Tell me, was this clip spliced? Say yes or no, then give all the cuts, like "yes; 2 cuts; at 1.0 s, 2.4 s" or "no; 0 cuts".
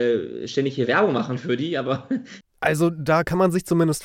yes; 1 cut; at 2.4 s